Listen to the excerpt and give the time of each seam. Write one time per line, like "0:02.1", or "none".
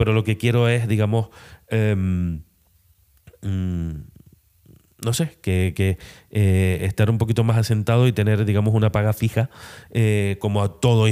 none